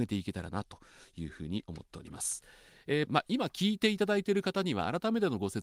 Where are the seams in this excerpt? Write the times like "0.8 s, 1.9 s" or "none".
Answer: 3.1 s